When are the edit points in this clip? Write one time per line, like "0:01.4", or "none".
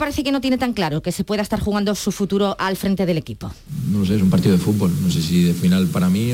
none